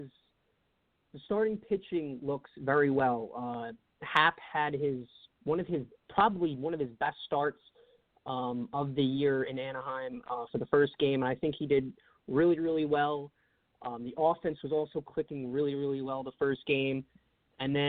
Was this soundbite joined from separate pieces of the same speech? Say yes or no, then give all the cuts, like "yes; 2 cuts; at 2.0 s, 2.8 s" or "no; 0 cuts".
no; 0 cuts